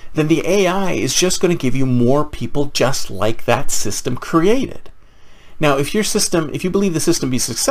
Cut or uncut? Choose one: uncut